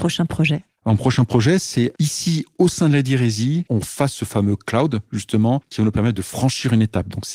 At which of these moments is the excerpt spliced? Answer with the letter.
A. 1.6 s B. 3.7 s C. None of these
B